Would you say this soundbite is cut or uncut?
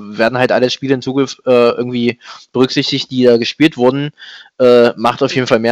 uncut